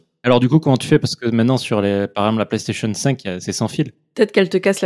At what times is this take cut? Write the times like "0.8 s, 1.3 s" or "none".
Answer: none